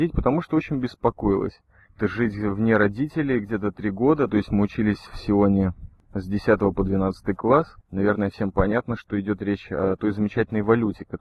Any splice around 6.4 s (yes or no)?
no